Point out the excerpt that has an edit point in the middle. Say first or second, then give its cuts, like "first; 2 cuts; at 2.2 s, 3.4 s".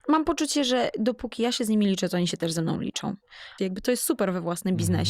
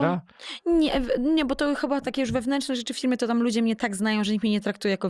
first; 1 cut; at 3.6 s